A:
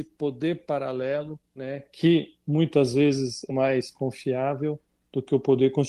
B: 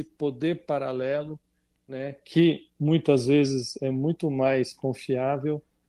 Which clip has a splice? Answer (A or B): A